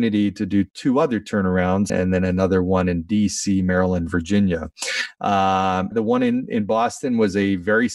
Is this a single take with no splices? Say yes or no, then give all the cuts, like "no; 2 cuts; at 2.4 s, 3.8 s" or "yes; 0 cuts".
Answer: no; 2 cuts; at 1.9 s, 5.9 s